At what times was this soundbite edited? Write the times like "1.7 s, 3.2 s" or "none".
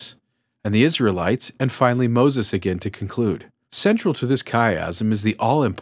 3.6 s

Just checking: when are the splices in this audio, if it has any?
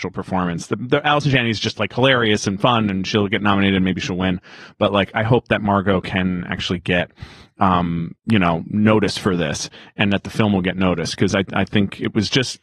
none

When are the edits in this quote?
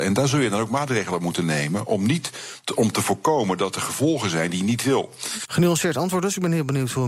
5.5 s

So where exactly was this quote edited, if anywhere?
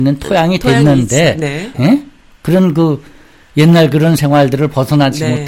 1.7 s

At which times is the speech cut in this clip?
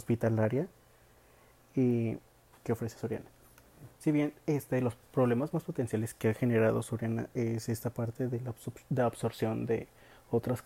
2.5 s, 3.9 s

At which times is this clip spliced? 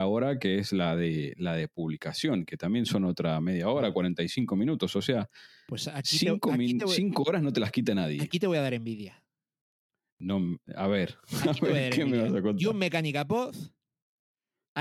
none

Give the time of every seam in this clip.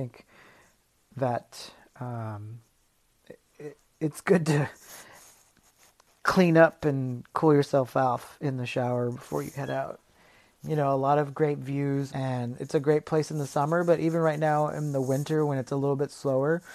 10.5 s, 12.1 s

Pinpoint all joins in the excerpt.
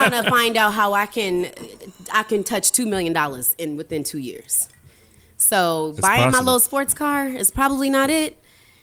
none

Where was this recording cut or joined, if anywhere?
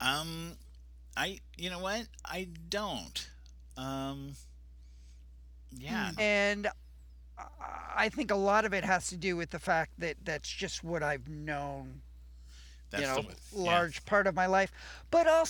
6.2 s, 13.2 s

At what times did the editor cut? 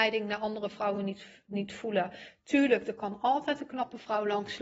none

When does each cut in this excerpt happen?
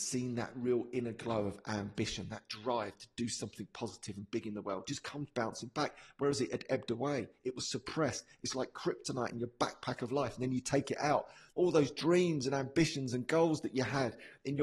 11.5 s

